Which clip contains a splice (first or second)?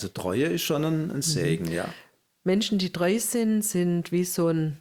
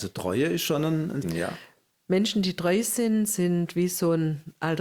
second